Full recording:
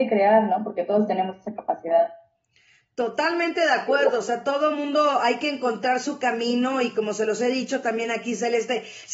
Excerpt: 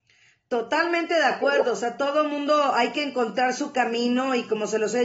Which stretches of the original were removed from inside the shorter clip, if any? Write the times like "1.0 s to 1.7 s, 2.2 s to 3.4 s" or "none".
none